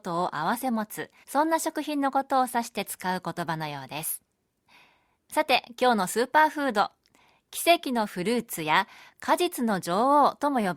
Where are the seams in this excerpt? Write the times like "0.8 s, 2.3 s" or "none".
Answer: 1.2 s